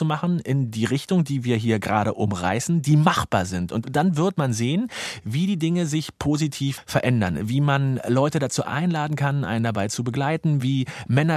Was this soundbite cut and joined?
no; 0 cuts

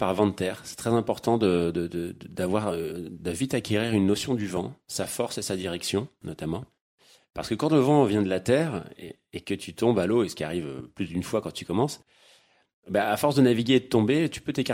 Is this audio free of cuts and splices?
yes; 0 cuts

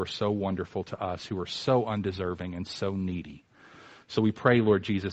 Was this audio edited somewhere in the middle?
no; 0 cuts

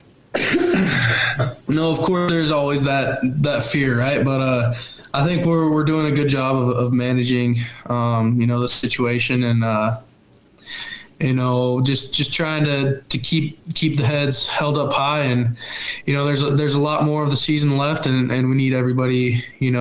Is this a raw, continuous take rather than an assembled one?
no; 1 cut; at 1.6 s

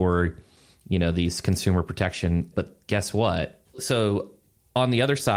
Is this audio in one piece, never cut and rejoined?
no; 1 cut; at 3.6 s

